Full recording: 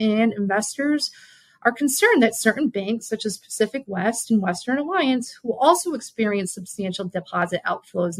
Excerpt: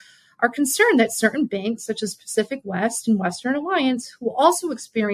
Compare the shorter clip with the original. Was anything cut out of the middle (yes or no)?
no